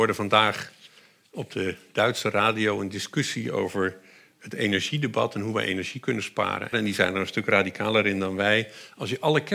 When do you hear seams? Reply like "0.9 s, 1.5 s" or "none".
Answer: 6.7 s